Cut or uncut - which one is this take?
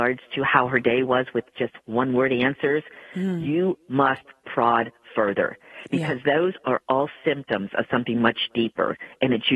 uncut